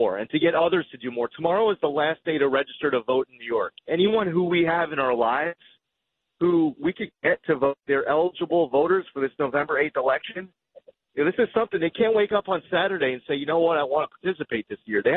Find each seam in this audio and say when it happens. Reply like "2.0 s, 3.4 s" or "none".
3.8 s